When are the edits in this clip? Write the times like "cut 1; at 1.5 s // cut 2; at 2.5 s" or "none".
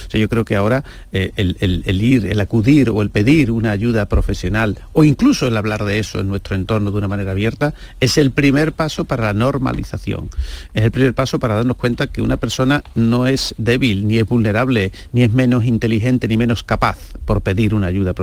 none